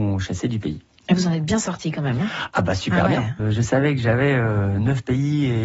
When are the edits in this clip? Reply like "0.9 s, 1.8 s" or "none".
3.4 s